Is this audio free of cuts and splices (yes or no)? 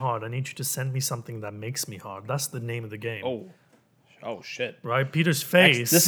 yes